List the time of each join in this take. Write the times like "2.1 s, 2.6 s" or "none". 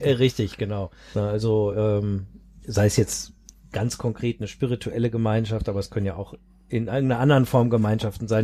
1.1 s